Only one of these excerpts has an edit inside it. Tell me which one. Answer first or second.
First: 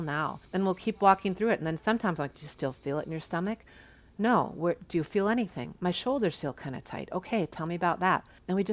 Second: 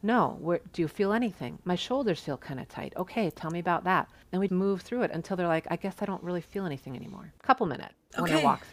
second